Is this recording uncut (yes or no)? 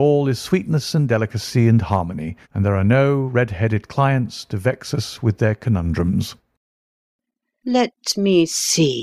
no